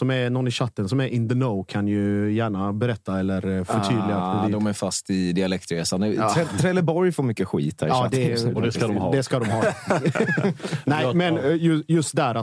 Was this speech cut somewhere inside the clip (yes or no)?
no